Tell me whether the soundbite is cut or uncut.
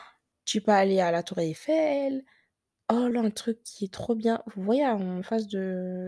cut